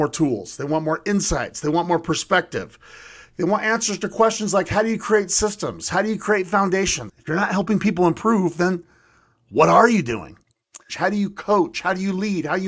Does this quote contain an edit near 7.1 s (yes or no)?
yes